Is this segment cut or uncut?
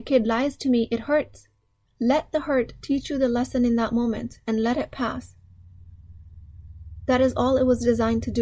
uncut